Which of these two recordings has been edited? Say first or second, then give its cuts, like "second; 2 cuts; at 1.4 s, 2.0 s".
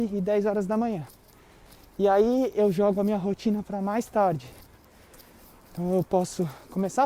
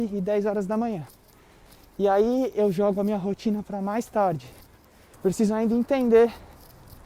second; 1 cut; at 5.1 s